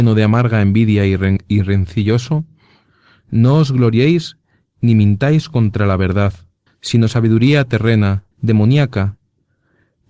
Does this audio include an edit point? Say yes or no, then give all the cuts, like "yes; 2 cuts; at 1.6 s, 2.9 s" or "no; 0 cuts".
yes; 2 cuts; at 6.7 s, 8.3 s